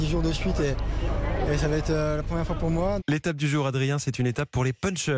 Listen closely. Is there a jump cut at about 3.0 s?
yes; 1 cut; at 3.0 s

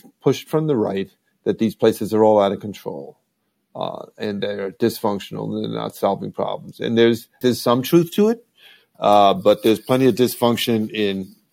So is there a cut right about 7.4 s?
yes; 1 cut; at 7.4 s

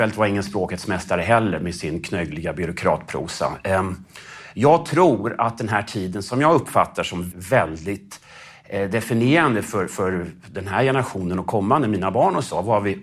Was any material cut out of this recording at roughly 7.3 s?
yes; 1 cut; at 7.3 s

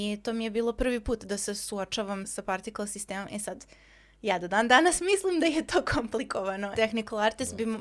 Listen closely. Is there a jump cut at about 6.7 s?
yes; 2 cuts; at 2.2 s, 6.7 s

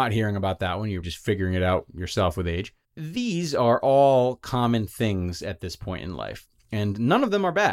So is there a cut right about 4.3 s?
no; 2 cuts; at 1.0 s, 2.8 s

